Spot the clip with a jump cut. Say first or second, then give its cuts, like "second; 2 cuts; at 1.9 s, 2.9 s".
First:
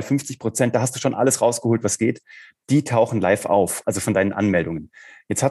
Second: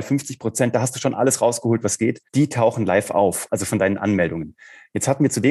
second; 1 cut; at 2.3 s